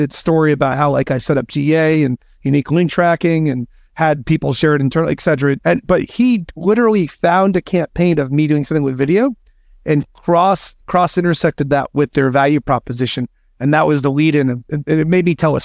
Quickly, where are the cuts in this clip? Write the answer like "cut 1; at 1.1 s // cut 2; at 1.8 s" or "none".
cut 1; at 5.6 s